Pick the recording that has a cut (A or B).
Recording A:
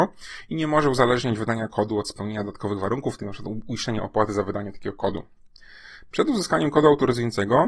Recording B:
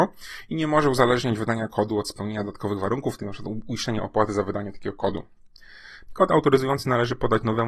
B